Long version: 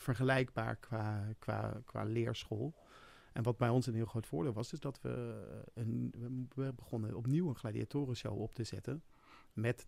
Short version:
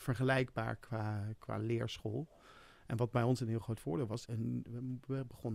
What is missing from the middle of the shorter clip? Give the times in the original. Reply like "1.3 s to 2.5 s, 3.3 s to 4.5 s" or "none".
1.4 s to 1.9 s, 4.7 s to 5.7 s